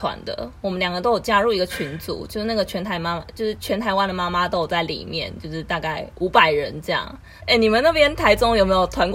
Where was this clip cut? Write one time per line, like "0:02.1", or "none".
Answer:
0:07.4